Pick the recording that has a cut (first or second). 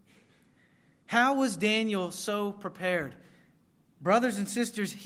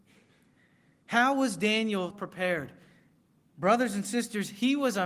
second